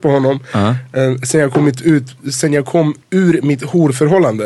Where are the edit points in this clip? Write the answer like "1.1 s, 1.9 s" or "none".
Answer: 3.0 s